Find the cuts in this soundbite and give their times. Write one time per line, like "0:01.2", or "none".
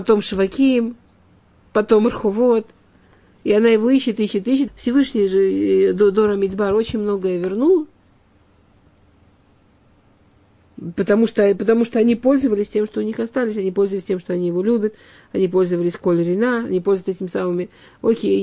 0:04.7